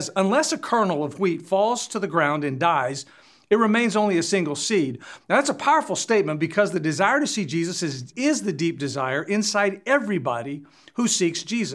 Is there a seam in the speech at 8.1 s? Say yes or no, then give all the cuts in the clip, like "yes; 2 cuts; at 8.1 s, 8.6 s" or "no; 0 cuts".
yes; 2 cuts; at 5.2 s, 8.1 s